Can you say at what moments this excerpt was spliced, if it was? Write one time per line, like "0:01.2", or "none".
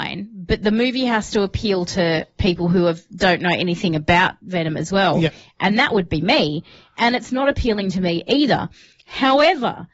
none